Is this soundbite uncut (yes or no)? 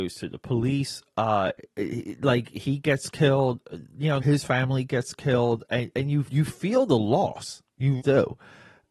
no